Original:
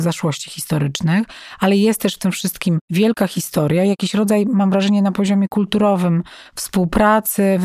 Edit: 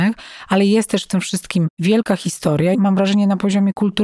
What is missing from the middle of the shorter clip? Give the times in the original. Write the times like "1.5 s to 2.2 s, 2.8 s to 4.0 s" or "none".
3.8 s to 4.5 s

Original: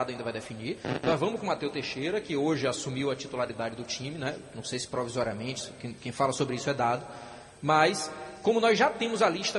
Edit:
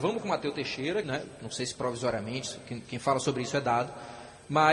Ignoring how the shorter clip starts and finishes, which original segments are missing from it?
2.2 s to 4.2 s

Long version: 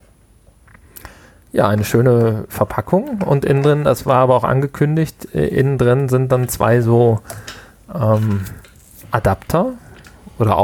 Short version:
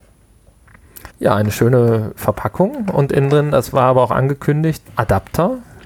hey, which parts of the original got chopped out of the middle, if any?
1.1 s to 1.4 s, 5.2 s to 9.0 s

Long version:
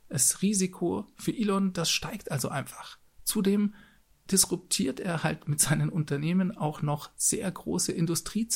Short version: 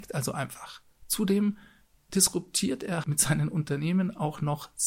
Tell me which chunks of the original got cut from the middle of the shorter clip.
5.2 s to 5.4 s

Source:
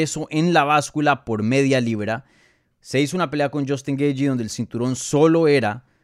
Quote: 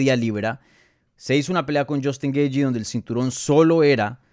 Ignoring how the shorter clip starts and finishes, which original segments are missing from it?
none

